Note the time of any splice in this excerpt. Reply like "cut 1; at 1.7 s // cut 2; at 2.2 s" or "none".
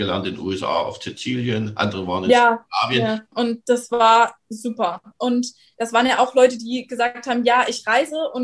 cut 1; at 3.3 s // cut 2; at 5.1 s